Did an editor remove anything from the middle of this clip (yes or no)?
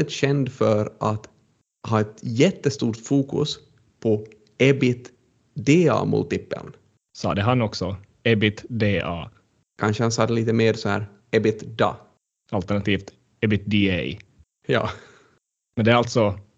no